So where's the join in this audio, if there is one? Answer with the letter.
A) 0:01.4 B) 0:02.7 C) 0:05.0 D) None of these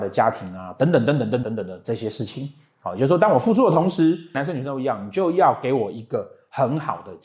A